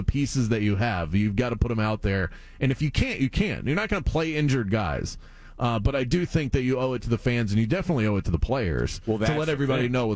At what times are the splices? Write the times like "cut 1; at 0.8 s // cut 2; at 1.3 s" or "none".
none